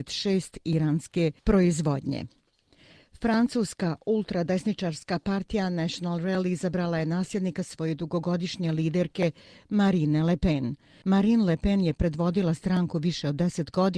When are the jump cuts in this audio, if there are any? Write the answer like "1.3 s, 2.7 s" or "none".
11.0 s